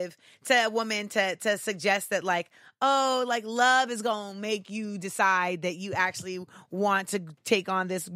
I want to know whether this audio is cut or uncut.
uncut